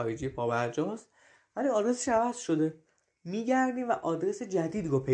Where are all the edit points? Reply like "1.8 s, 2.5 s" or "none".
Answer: none